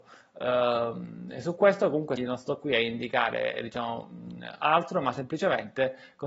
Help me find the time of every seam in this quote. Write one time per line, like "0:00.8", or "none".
0:02.2